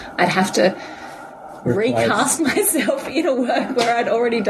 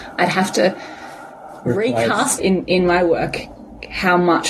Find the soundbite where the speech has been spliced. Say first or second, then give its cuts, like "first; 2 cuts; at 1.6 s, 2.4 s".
second; 1 cut; at 2.4 s